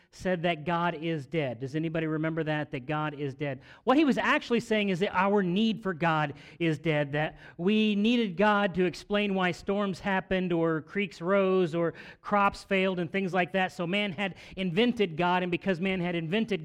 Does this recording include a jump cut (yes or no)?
no